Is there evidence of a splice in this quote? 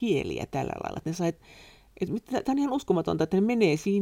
no; 0 cuts

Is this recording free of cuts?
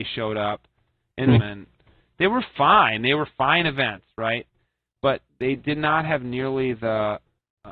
no; 1 cut; at 1.4 s

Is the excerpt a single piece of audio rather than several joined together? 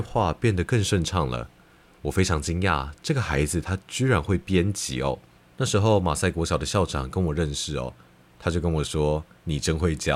no; 1 cut; at 5.4 s

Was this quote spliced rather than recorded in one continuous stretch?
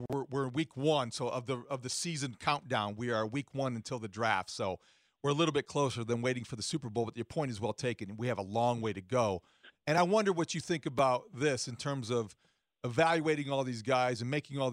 no; 0 cuts

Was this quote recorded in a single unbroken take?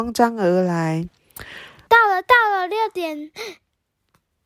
no; 1 cut; at 1.9 s

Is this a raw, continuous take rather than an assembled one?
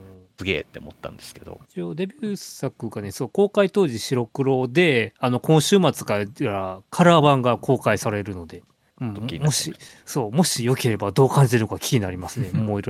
no; 1 cut; at 1.6 s

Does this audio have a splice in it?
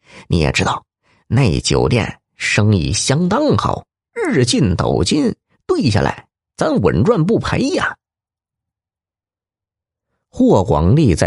no; 0 cuts

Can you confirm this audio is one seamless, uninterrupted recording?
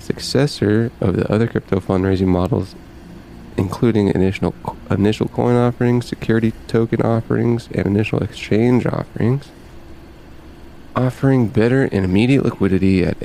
yes; 0 cuts

